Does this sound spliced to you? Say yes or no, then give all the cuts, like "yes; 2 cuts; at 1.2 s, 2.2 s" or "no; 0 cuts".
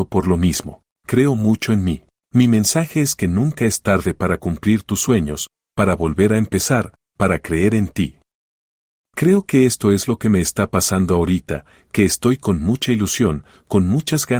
no; 0 cuts